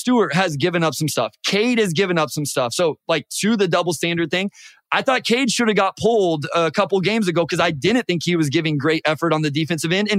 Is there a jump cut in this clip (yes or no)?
no